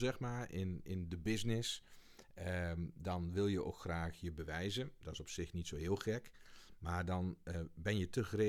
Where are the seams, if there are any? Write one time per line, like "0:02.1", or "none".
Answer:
none